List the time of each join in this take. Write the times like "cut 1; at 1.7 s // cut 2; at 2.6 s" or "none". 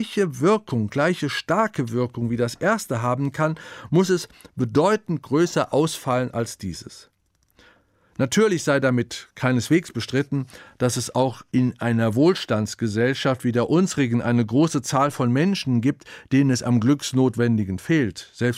none